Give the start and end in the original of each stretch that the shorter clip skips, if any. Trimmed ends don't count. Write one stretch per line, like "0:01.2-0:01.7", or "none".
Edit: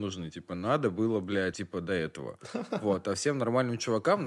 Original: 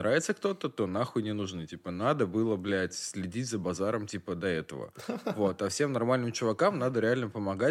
0:02.9-0:04.1